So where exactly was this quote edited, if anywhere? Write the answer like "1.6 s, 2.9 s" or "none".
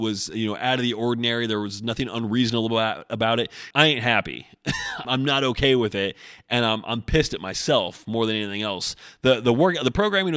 3.7 s, 5.0 s